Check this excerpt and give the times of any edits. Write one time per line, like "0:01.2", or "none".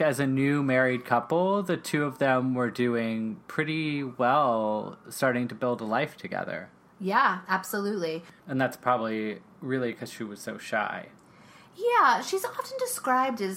0:08.4